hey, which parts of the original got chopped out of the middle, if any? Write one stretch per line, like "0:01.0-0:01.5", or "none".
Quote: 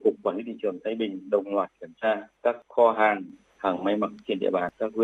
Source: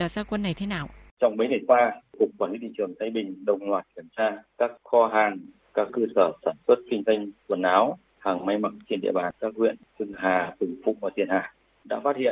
0:05.7-0:08.1